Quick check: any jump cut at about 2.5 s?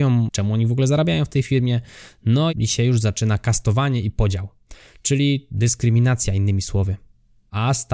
yes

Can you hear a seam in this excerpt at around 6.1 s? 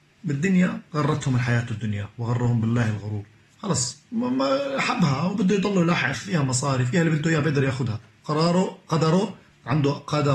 yes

